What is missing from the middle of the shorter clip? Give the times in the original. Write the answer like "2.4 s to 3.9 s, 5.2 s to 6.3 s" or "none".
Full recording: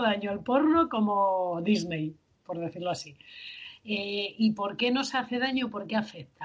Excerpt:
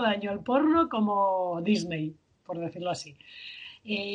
none